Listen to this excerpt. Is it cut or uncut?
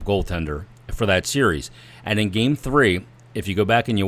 uncut